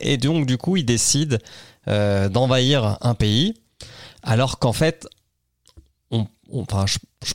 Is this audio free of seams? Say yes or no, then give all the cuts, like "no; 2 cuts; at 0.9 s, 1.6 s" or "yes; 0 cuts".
yes; 0 cuts